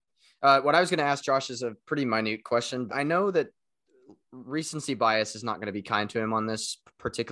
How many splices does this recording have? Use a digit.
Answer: 1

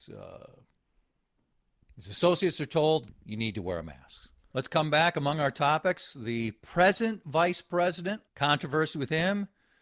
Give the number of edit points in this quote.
3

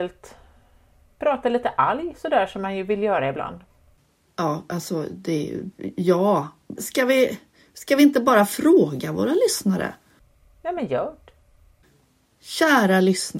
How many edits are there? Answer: 1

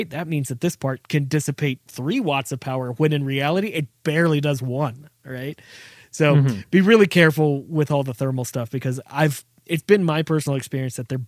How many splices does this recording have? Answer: 1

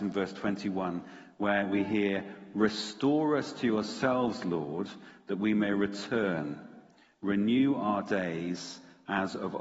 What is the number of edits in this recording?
0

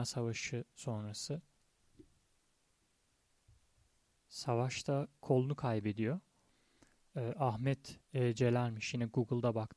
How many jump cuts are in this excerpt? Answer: 0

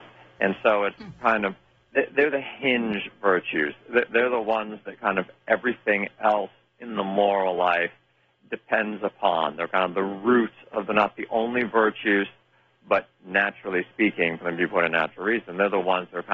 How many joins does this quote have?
0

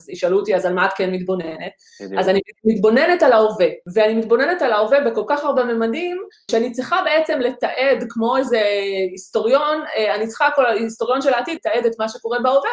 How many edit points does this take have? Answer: 2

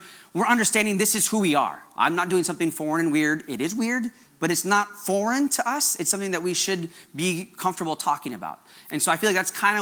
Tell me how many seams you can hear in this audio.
0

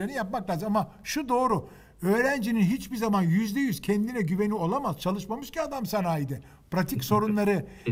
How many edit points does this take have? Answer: 0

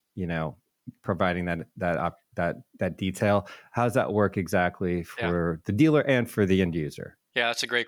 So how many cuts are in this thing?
0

